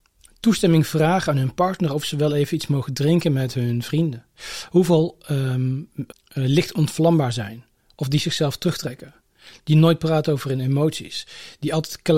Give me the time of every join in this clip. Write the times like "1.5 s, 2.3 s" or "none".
6.1 s